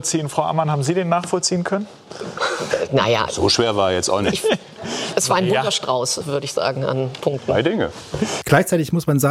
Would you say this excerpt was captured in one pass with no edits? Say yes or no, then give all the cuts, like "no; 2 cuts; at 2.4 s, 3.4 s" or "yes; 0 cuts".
no; 1 cut; at 8.4 s